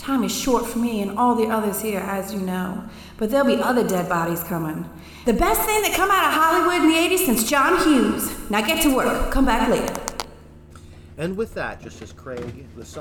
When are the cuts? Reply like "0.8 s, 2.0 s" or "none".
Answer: 5.2 s, 11.8 s

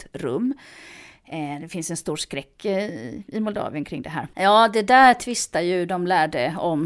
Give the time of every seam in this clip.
4.3 s

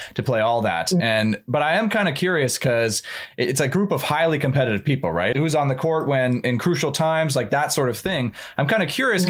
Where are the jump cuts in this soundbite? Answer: 5.3 s

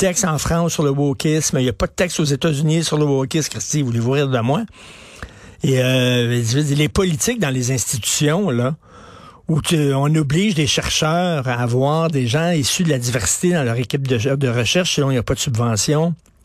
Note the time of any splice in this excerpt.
none

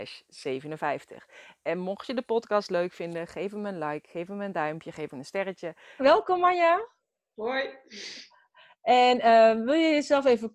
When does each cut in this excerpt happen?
6.0 s

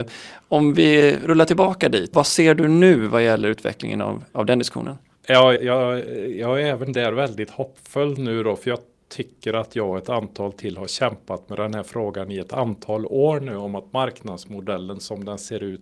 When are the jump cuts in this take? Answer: 2.1 s, 5.6 s

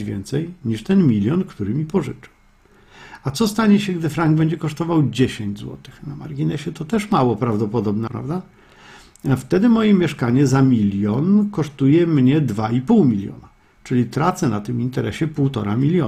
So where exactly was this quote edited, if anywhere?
8.1 s

